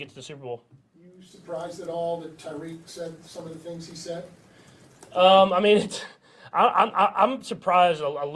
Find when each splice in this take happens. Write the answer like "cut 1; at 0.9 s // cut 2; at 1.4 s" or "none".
none